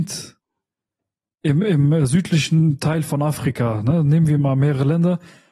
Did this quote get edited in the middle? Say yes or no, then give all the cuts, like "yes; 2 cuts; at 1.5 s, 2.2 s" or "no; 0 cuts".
no; 0 cuts